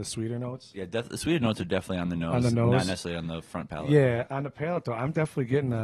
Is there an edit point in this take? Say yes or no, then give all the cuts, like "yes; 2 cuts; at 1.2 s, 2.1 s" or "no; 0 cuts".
no; 0 cuts